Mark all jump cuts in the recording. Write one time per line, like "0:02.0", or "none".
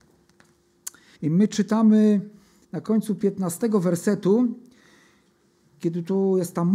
0:01.2

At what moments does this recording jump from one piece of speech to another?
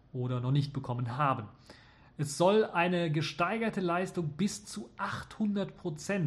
none

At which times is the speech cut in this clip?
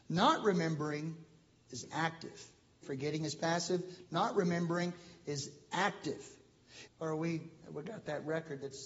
0:02.8
0:06.9

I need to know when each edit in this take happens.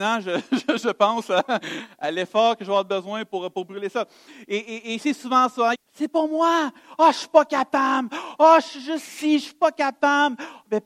0:05.7

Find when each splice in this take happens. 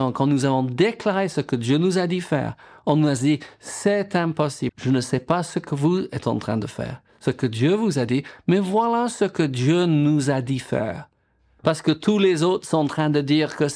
0:04.7
0:11.6

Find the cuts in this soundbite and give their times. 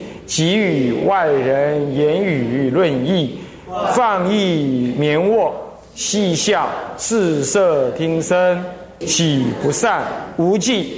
0:09.0

